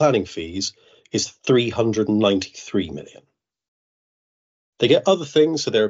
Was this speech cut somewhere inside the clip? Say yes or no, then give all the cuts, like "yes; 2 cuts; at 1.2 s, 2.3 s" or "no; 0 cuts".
no; 0 cuts